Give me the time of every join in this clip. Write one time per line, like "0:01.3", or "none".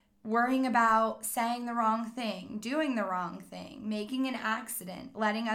none